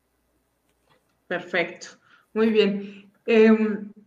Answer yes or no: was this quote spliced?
no